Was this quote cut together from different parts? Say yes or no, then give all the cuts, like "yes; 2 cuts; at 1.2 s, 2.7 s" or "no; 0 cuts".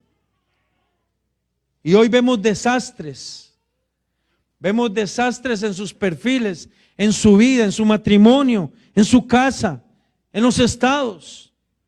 no; 0 cuts